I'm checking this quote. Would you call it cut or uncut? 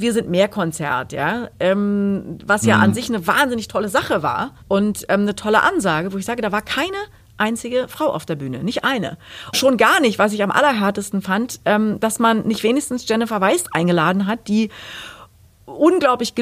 cut